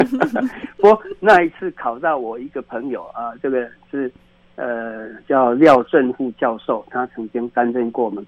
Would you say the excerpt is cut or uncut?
uncut